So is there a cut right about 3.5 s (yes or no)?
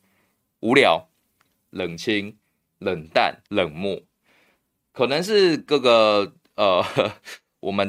yes